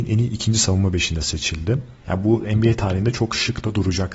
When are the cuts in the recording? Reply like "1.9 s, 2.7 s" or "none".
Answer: 2.0 s